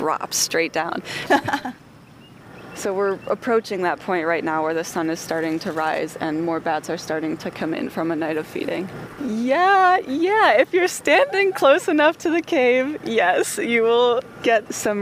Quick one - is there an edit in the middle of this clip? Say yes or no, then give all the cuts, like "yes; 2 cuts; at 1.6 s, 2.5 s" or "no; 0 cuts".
yes; 2 cuts; at 1.3 s, 9.2 s